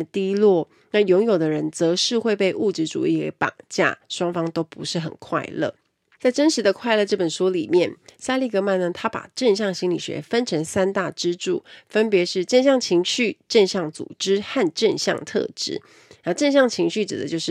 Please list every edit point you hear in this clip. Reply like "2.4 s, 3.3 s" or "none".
6.1 s